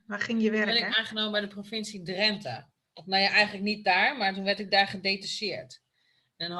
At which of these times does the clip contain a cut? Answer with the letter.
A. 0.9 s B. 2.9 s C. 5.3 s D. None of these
A